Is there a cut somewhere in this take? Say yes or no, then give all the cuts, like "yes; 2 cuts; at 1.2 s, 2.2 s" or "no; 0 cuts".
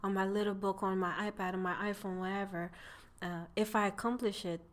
no; 0 cuts